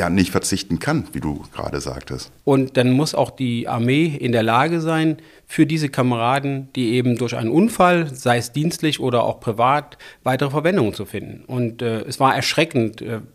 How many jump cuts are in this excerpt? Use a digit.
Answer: 1